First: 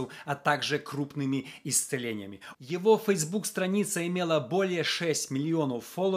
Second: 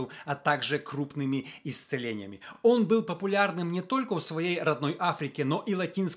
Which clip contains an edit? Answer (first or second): first